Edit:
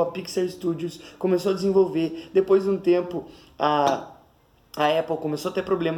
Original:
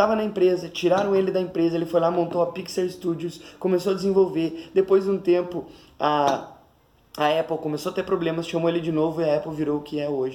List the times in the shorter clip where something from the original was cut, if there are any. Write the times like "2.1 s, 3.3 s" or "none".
none